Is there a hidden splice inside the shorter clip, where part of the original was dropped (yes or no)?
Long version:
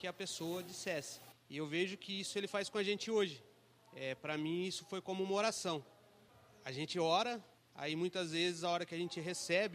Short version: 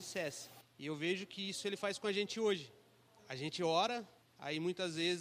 yes